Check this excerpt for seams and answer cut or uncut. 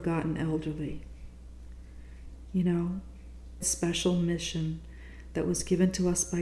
cut